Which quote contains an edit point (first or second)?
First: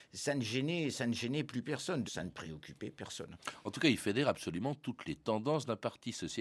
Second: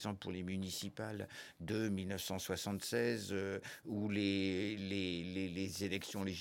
first